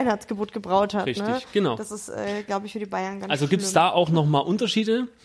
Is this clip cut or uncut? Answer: uncut